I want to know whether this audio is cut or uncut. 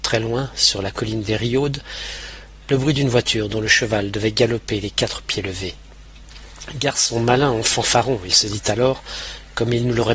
uncut